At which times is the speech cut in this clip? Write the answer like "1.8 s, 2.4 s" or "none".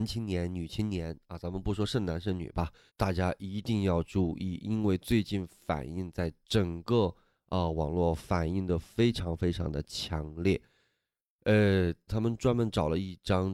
2.9 s, 12.1 s

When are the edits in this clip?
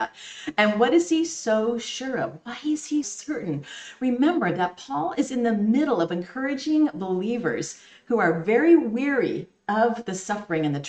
3.0 s

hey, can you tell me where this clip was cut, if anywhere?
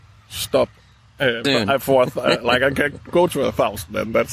1.4 s

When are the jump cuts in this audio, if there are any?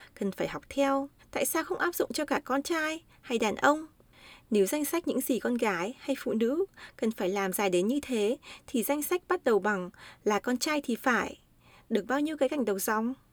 1.2 s

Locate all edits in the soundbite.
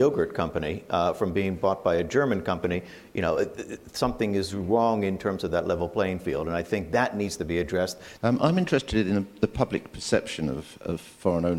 8.2 s

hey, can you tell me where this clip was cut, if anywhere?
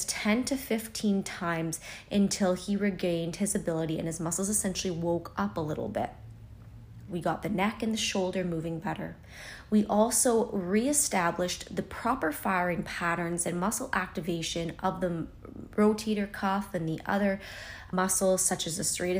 7.1 s, 17.9 s

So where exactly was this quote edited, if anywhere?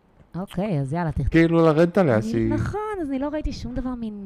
1.3 s

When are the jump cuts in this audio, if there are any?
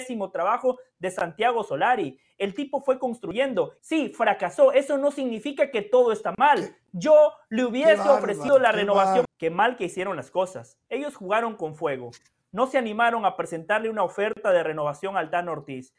3.8 s, 9.3 s

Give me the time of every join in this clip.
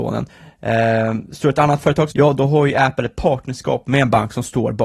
2.1 s

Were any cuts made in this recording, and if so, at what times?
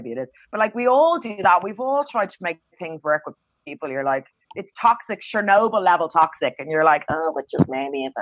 none

